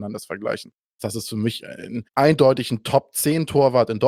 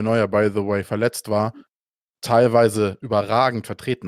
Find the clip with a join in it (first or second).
first